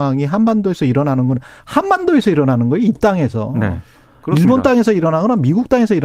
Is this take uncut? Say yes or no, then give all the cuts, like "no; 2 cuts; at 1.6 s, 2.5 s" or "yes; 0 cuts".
yes; 0 cuts